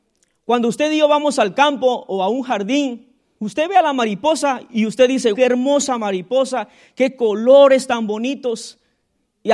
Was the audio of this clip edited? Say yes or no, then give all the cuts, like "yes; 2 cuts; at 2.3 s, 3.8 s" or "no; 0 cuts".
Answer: yes; 2 cuts; at 3.4 s, 5.3 s